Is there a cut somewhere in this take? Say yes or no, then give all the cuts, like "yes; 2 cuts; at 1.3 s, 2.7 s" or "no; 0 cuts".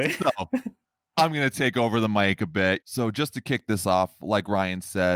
yes; 1 cut; at 2.8 s